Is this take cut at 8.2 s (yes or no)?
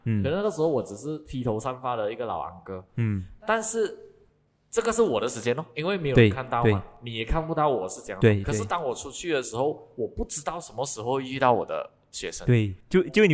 no